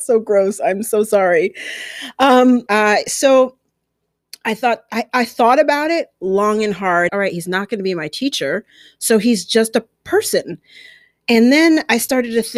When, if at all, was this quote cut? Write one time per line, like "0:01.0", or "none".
0:02.7
0:07.1